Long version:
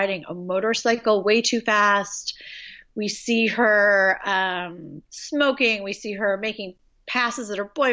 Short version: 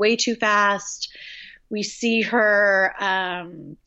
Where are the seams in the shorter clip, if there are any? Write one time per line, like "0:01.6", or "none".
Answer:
none